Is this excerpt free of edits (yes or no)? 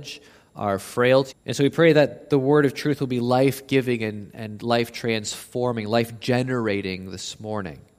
no